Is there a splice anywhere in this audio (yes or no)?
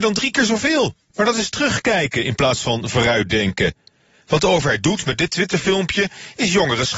yes